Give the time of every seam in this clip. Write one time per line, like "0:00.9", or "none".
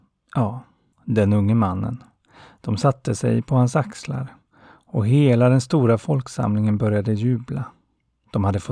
0:00.9